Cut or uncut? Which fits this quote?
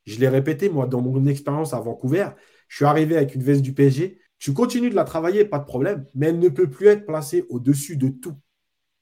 cut